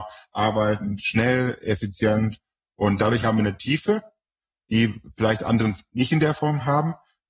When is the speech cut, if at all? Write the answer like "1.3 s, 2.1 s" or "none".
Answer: none